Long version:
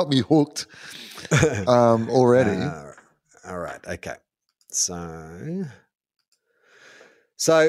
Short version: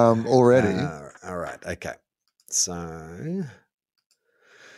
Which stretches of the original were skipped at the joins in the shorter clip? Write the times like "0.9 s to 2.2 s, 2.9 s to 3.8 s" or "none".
3.0 s to 3.4 s